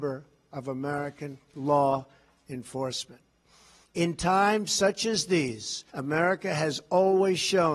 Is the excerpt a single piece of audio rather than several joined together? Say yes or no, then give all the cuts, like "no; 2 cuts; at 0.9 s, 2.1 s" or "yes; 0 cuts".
no; 2 cuts; at 3.8 s, 5.9 s